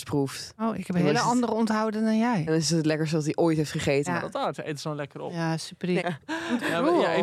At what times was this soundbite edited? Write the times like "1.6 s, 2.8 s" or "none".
4.1 s, 6.0 s